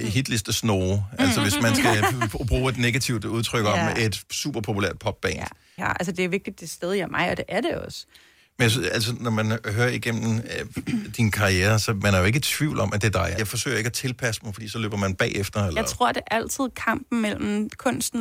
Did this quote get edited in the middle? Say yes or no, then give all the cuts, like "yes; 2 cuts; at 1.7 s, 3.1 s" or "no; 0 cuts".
yes; 2 cuts; at 5.8 s, 13.4 s